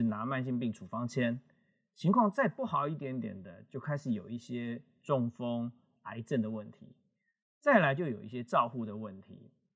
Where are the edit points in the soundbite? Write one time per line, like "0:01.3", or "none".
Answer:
none